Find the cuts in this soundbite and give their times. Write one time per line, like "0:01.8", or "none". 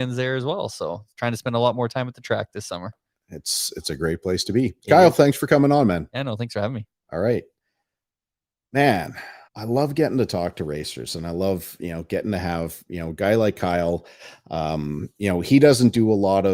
0:09.4